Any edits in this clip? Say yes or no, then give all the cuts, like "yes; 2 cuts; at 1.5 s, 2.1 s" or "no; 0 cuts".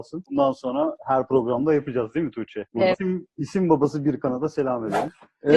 yes; 1 cut; at 2.9 s